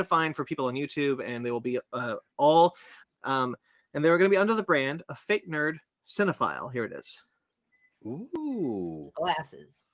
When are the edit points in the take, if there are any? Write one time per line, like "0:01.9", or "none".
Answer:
0:03.0